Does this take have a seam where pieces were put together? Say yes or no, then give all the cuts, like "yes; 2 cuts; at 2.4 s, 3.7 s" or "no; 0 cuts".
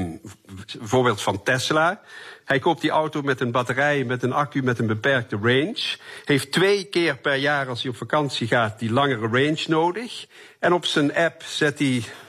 no; 0 cuts